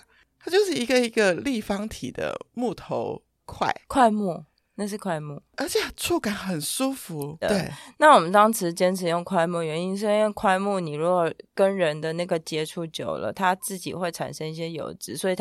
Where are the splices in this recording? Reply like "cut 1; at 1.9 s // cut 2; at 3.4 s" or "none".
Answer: cut 1; at 7.4 s